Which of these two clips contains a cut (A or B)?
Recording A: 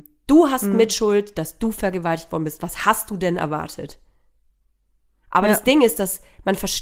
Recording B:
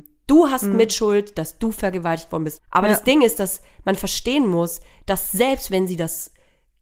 B